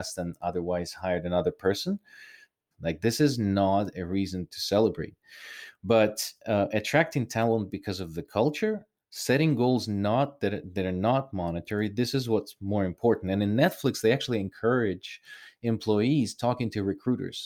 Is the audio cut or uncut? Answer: cut